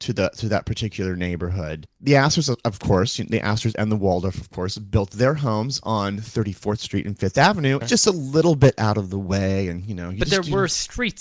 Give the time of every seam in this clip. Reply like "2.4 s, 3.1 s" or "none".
7.8 s